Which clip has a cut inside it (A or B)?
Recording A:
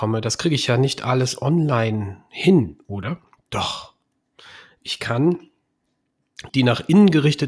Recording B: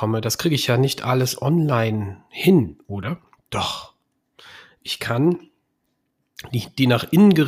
A